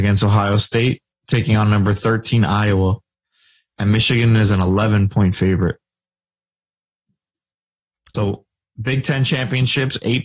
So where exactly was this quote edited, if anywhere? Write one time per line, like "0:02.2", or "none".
0:08.1